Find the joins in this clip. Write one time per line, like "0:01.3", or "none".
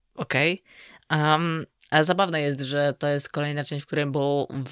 none